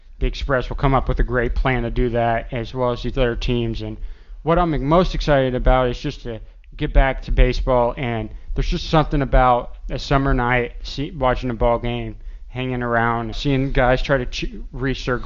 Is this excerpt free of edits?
no; 1 cut; at 13.3 s

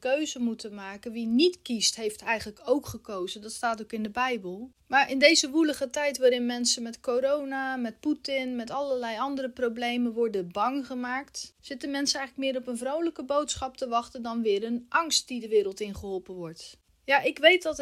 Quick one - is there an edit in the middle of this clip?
no; 0 cuts

